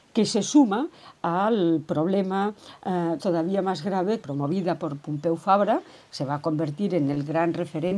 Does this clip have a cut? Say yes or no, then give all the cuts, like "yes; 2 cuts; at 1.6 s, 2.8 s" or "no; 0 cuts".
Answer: yes; 2 cuts; at 3.2 s, 4.2 s